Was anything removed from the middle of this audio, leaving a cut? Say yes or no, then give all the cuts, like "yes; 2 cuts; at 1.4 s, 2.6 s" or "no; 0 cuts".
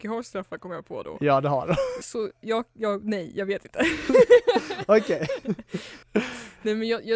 yes; 2 cuts; at 2.0 s, 6.0 s